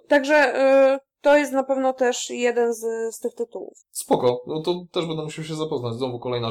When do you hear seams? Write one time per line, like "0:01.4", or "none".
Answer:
0:03.8